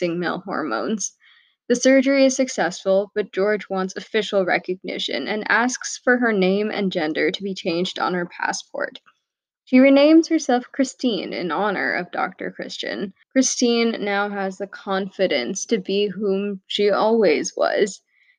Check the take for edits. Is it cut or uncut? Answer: cut